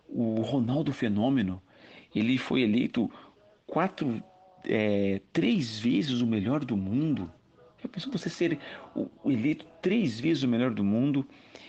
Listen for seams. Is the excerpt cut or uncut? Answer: uncut